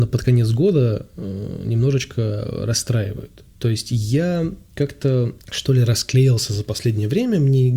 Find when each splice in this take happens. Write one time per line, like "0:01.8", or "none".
0:05.4